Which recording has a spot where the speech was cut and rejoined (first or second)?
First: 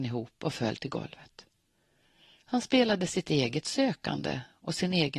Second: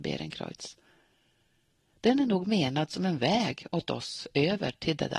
first